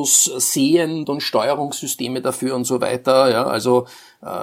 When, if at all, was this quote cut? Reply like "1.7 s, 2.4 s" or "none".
1.1 s